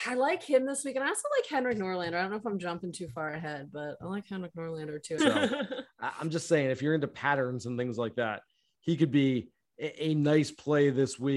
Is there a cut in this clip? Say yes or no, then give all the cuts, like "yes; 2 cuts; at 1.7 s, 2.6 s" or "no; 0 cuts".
yes; 1 cut; at 5.2 s